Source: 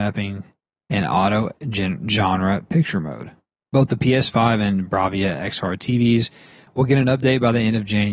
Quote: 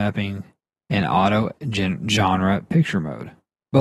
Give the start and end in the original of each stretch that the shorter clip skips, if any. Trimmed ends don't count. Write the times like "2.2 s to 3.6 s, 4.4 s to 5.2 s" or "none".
none